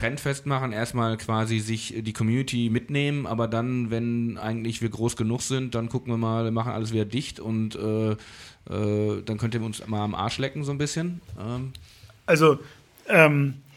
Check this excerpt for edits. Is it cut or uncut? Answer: uncut